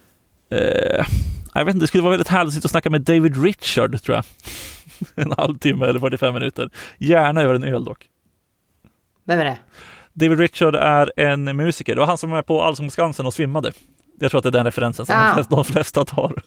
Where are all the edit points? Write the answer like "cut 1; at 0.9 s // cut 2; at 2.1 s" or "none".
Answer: none